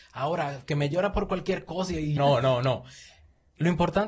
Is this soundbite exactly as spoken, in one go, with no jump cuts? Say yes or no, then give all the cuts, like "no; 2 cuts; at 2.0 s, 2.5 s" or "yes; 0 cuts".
no; 1 cut; at 2.2 s